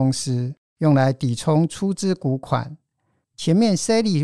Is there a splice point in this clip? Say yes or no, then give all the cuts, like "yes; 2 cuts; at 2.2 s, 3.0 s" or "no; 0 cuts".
no; 0 cuts